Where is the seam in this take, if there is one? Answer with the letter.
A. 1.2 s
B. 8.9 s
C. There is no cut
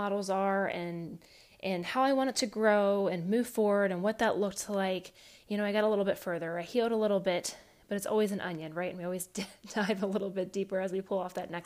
C